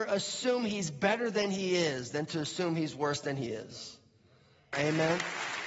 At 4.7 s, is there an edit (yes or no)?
yes